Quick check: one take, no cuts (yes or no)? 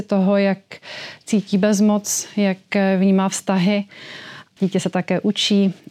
no